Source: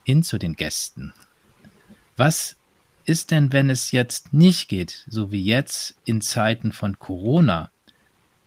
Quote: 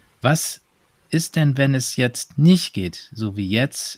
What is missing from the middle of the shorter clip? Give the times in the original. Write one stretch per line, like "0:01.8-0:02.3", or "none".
none

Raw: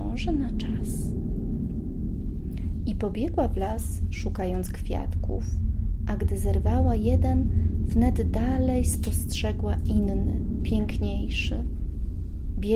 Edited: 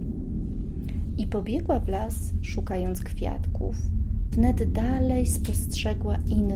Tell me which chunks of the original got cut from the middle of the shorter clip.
0:06.0-0:07.9

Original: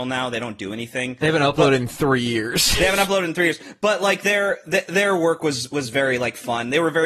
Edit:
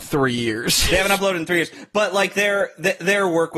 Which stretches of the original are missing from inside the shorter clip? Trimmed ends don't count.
none

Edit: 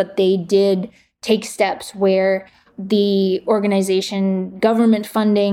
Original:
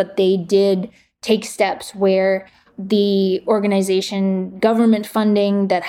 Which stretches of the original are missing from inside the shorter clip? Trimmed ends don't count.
none

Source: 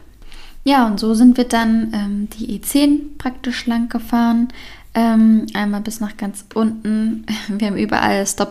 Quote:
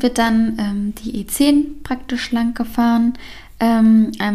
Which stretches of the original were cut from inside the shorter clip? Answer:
none

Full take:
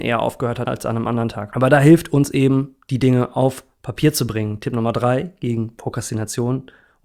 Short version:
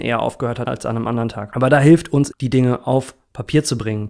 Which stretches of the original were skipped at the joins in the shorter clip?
0:02.3-0:02.8

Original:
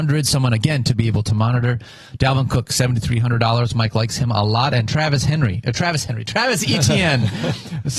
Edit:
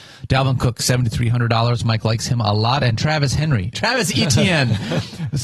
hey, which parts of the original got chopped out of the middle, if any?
0:05.6-0:06.3

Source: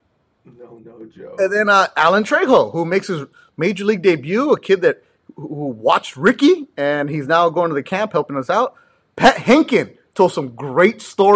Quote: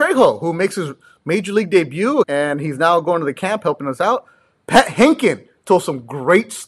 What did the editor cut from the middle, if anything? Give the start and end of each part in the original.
0:04.5-0:06.7

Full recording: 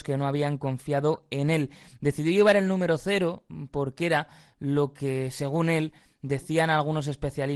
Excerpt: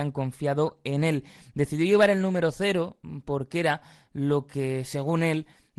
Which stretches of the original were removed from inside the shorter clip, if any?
none

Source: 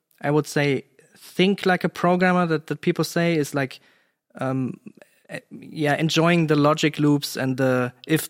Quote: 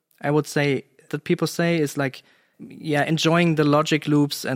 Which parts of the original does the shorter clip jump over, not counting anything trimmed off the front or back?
0:01.1-0:02.7
0:04.1-0:05.4

